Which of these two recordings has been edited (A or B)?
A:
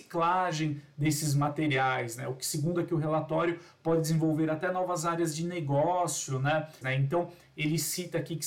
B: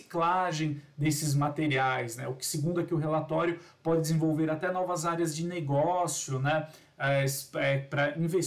A